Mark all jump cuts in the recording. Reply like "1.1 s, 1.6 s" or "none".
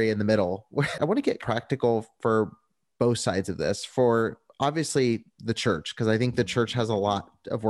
1.0 s